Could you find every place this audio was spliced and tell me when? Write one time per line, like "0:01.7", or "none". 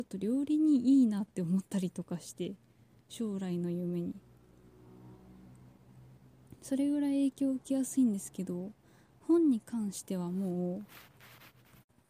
none